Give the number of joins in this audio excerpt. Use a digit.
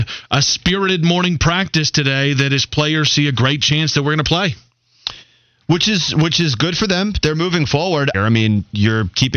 1